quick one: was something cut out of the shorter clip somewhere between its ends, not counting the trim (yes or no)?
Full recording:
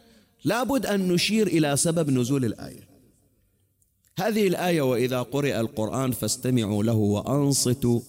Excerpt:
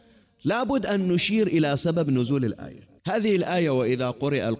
yes